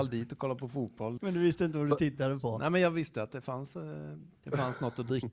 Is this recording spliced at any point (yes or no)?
yes